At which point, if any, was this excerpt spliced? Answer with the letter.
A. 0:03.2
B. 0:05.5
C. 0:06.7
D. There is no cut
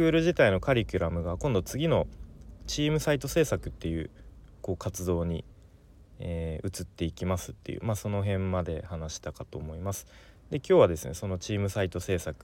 D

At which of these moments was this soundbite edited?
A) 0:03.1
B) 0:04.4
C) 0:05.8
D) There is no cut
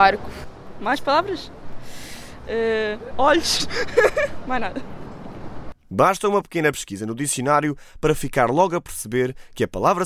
A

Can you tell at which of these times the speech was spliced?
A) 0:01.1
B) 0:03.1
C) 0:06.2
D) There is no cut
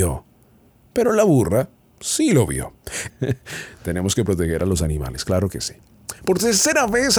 B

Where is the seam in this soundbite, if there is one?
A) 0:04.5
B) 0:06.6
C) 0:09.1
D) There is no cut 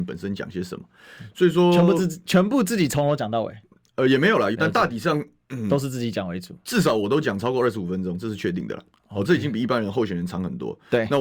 A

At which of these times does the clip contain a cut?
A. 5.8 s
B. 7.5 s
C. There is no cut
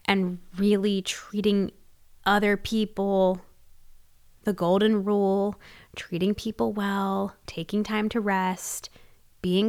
B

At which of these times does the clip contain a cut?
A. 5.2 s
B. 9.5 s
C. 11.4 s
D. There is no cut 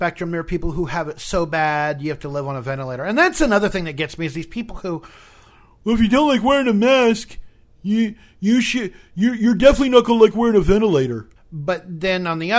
C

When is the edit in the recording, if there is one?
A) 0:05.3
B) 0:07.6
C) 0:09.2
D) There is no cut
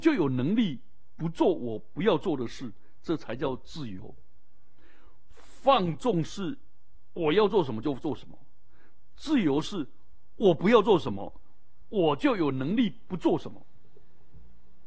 D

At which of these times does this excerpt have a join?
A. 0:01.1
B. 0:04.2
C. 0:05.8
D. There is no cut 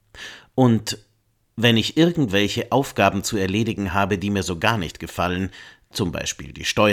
D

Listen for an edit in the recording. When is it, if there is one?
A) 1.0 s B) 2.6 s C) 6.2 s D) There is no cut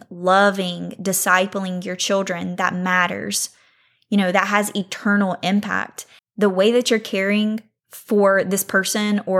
C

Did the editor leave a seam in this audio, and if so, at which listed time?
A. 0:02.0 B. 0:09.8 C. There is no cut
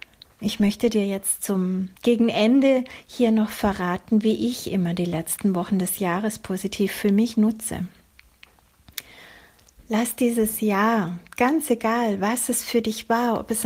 A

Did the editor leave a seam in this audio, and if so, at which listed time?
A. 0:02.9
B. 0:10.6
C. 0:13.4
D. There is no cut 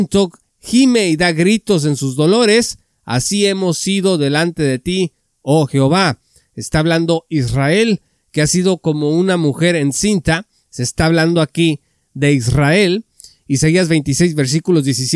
B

